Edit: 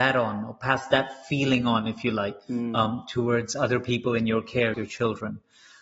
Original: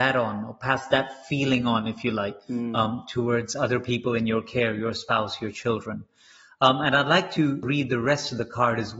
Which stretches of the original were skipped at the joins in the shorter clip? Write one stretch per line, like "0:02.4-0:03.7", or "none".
0:04.7-0:05.4